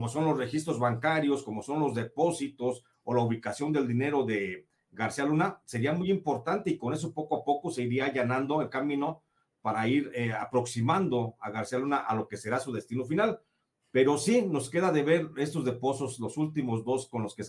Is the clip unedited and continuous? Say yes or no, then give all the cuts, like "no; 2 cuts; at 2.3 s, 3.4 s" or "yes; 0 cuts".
yes; 0 cuts